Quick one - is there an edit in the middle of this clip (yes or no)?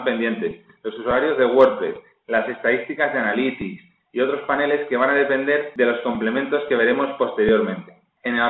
no